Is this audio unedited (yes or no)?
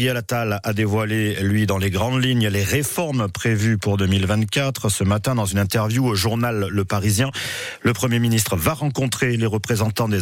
yes